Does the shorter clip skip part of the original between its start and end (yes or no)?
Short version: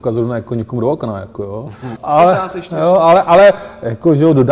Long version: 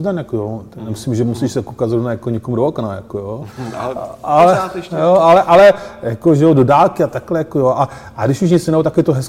yes